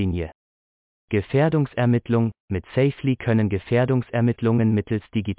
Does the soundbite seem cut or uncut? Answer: uncut